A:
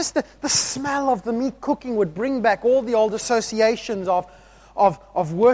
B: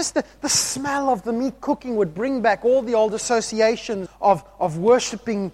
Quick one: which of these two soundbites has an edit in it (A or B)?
B